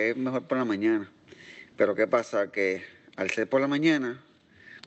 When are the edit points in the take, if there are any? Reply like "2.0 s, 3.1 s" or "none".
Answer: none